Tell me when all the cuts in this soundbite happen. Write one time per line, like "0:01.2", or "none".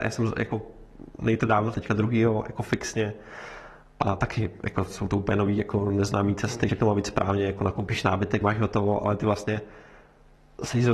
0:01.7
0:06.7
0:08.4